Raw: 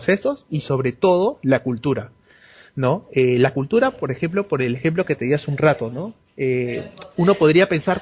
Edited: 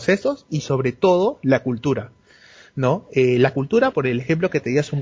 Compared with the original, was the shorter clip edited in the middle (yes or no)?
yes